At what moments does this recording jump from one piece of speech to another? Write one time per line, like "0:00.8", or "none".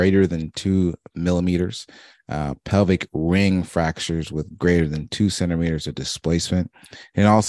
none